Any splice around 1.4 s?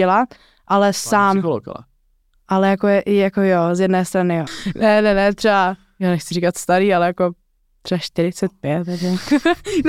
no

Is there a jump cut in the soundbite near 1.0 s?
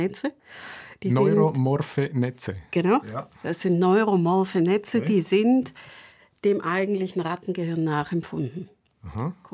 no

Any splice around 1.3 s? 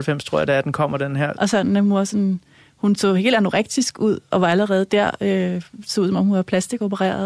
yes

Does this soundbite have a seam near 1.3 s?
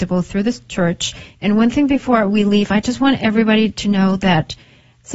yes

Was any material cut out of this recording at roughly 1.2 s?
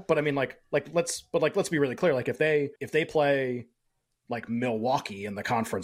no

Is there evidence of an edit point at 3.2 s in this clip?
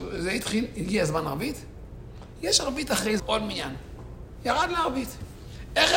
yes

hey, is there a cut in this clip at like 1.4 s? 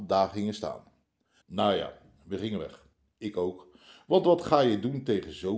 yes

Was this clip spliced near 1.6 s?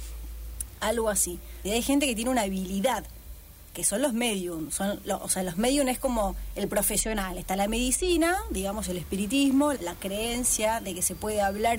yes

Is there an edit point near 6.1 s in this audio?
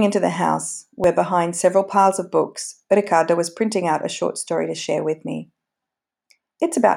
no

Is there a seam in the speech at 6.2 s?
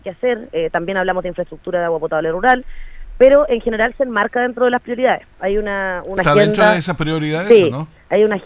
yes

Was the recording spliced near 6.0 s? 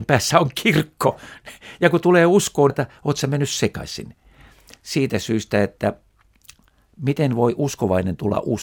no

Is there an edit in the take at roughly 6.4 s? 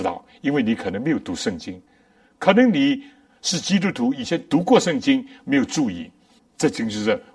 yes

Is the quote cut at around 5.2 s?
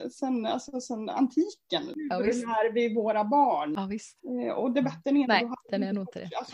yes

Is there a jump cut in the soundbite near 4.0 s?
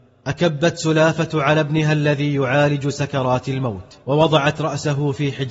yes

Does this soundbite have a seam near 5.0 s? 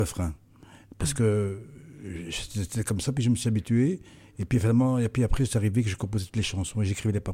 no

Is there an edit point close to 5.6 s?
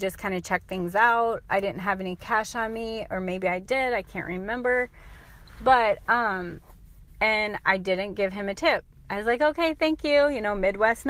no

